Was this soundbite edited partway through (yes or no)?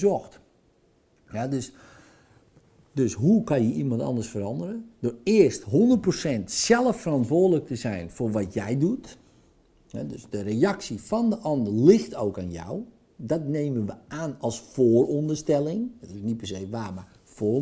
no